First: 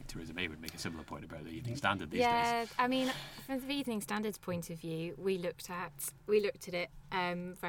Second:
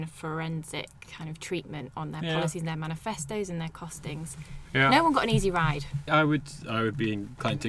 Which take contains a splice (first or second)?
second